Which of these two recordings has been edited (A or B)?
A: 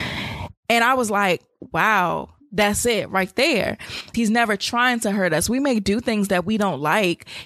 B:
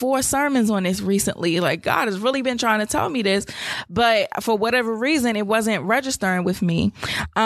A